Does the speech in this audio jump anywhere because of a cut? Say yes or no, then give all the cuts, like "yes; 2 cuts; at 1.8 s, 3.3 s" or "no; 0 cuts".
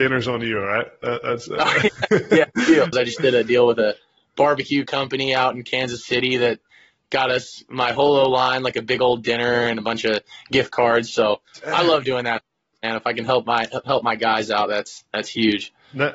yes; 1 cut; at 2.9 s